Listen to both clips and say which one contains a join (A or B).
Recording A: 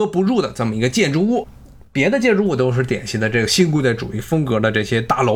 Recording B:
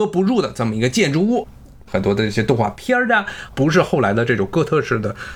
B